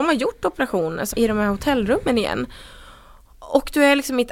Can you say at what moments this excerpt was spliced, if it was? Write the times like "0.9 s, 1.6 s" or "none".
1.1 s